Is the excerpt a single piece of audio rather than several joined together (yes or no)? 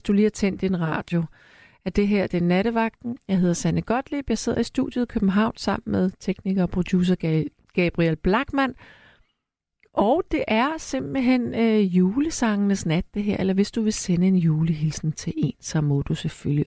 yes